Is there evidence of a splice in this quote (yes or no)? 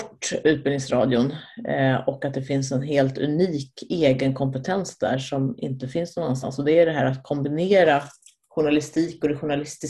no